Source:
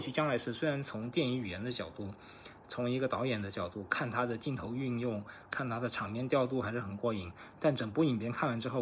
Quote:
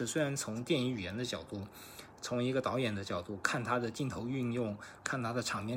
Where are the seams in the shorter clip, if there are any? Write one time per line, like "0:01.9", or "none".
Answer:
none